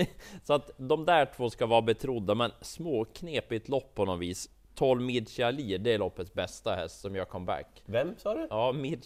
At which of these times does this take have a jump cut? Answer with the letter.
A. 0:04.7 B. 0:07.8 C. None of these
C